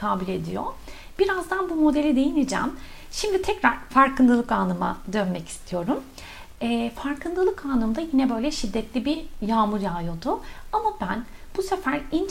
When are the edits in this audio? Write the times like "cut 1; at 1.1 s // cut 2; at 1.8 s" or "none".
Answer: none